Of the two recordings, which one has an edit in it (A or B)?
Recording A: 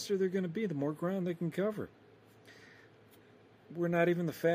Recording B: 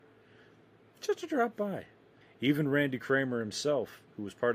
B